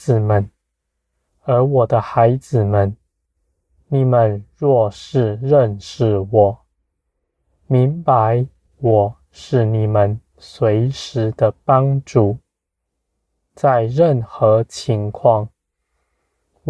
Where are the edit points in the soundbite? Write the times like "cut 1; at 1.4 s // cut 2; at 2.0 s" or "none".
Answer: cut 1; at 1.3 s

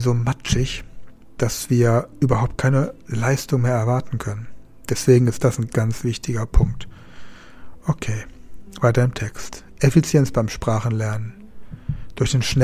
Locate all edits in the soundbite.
cut 1; at 5.7 s

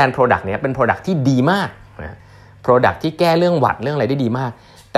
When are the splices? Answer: none

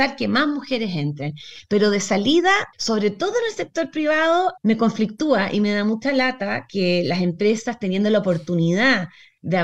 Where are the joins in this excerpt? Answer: cut 1; at 2.7 s // cut 2; at 4.6 s

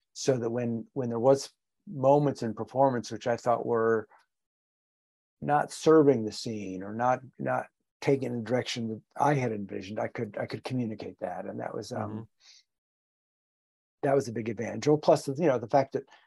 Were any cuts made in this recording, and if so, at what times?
none

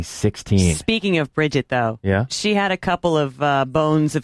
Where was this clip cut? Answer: none

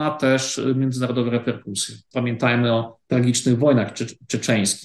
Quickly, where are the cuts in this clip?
cut 1; at 2.1 s

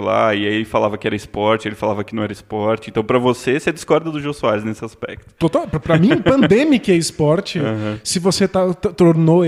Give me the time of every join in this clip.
none

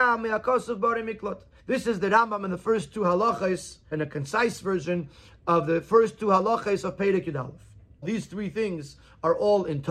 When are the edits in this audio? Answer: cut 1; at 1.6 s // cut 2; at 3.9 s // cut 3; at 8.0 s

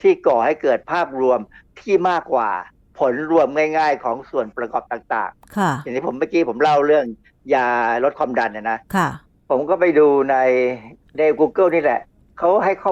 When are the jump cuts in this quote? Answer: cut 1; at 2.2 s

